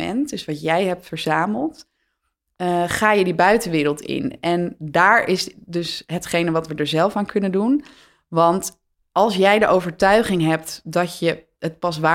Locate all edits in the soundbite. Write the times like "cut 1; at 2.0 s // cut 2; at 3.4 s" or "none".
none